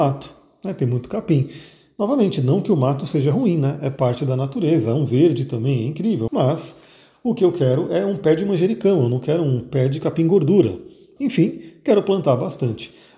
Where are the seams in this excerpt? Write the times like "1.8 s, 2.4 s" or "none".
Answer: 6.3 s, 11.2 s